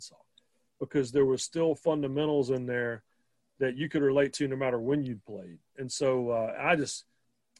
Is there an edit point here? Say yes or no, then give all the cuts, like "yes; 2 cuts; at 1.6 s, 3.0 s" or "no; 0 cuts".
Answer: no; 0 cuts